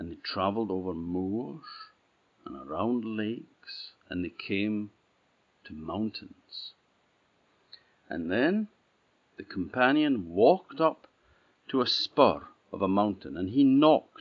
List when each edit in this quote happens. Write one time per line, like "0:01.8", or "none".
0:04.0